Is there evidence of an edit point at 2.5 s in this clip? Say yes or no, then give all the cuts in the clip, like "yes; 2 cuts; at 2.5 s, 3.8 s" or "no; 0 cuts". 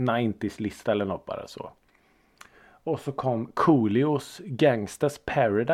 no; 0 cuts